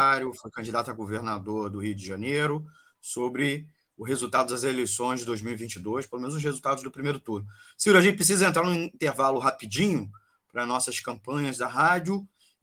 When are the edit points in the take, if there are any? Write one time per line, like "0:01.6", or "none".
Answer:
none